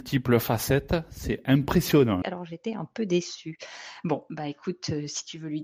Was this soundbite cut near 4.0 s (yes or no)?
no